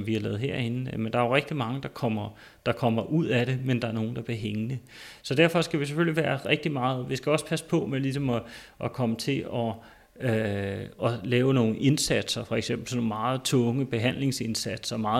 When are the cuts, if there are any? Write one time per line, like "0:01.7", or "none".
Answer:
none